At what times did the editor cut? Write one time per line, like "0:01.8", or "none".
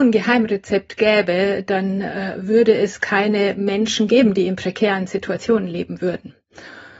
none